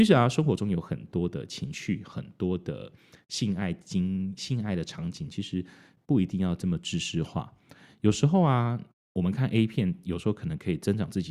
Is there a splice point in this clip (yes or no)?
no